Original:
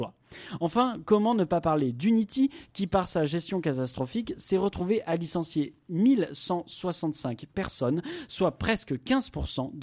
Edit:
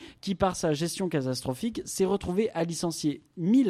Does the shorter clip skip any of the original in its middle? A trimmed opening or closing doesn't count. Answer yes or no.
no